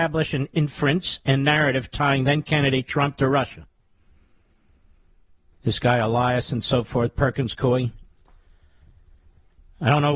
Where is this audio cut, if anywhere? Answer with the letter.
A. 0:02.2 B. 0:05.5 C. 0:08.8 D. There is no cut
B